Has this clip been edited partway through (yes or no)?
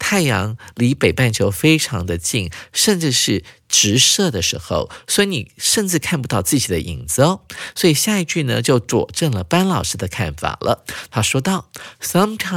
no